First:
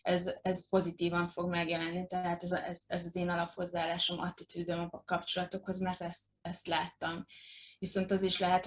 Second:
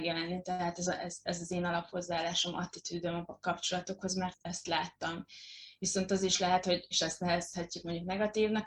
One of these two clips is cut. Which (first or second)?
second